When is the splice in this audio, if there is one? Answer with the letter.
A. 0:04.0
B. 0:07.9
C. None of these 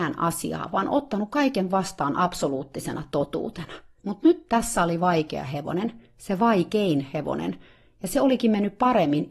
A